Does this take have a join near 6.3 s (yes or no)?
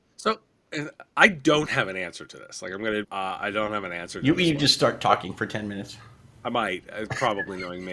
no